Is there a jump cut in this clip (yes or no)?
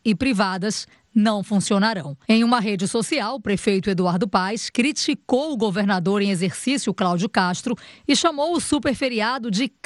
yes